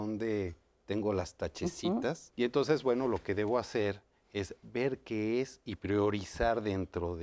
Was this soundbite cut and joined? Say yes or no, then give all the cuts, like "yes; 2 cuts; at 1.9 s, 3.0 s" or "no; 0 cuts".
yes; 1 cut; at 2.3 s